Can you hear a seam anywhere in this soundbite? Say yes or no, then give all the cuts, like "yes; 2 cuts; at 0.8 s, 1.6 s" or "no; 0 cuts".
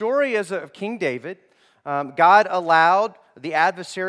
no; 0 cuts